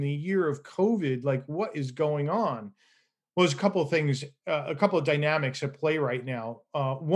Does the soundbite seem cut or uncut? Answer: uncut